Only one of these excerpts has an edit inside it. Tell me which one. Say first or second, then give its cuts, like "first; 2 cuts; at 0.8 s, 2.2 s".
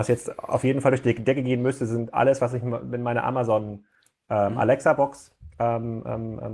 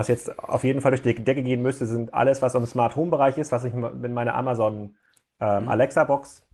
first; 1 cut; at 2.4 s